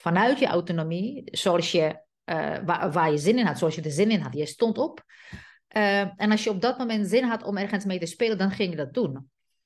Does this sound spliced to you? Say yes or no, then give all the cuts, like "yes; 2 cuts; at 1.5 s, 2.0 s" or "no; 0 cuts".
no; 0 cuts